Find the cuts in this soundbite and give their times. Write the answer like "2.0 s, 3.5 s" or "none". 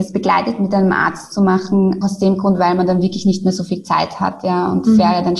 2.0 s